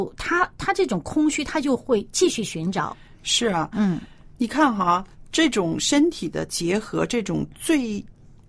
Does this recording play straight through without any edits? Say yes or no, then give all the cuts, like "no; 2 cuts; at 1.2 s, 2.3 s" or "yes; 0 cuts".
yes; 0 cuts